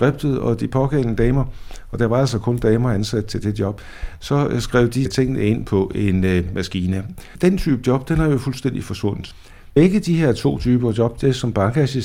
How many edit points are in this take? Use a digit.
0